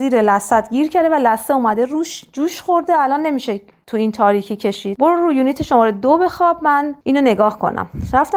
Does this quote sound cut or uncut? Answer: uncut